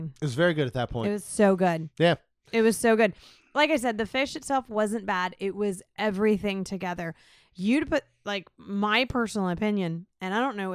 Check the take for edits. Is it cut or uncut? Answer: uncut